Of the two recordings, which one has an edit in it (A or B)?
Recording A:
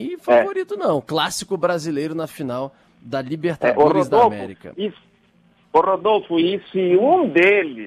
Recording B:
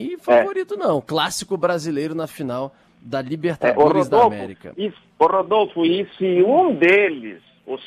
B